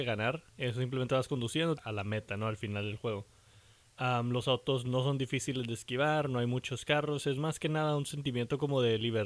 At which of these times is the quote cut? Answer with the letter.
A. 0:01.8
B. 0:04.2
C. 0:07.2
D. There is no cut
A